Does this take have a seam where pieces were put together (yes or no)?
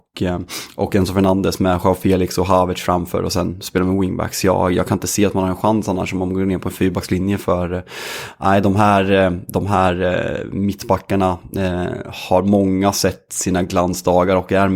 no